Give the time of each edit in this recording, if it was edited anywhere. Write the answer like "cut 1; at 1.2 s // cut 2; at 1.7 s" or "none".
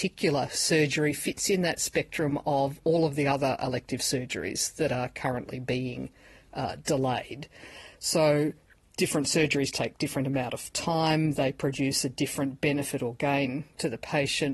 none